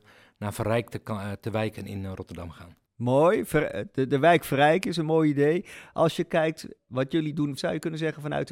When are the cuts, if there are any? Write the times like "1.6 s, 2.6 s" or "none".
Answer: 7.6 s